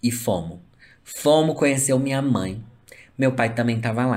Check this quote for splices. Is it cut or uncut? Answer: uncut